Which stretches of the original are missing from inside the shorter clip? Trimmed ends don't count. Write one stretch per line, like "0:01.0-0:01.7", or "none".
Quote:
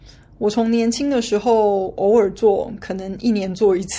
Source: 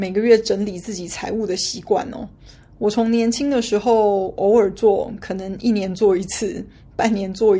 none